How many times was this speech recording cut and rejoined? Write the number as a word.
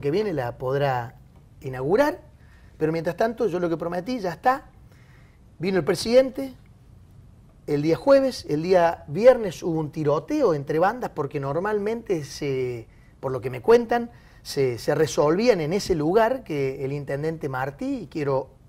zero